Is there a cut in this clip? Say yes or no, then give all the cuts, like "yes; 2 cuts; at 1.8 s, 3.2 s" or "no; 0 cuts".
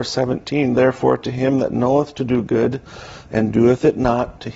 no; 0 cuts